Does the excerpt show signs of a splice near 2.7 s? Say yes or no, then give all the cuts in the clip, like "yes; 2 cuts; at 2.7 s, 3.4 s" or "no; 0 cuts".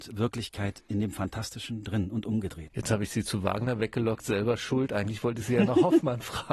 yes; 1 cut; at 2.7 s